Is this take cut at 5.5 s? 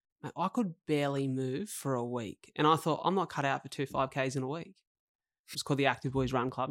yes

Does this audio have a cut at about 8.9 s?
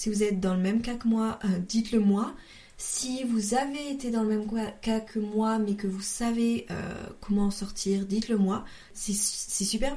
yes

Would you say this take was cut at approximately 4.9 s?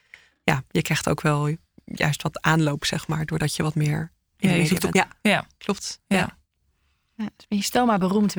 yes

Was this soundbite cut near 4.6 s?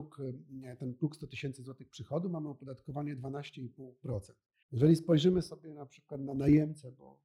yes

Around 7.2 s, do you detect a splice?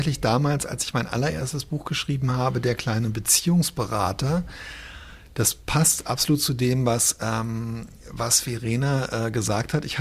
no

